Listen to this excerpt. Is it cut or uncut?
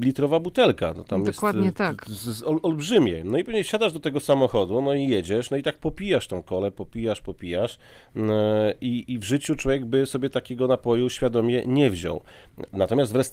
uncut